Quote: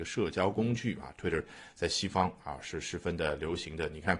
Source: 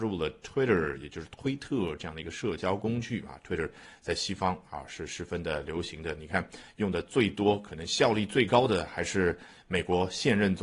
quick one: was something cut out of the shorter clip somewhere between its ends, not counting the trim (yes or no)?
no